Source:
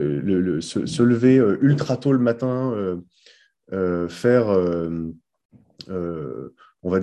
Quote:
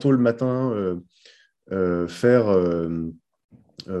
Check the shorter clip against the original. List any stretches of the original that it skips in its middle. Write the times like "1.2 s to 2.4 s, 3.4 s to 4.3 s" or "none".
none